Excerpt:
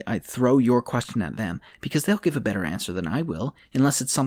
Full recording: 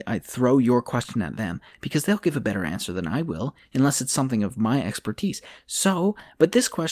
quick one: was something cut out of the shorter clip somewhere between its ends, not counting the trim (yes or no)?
no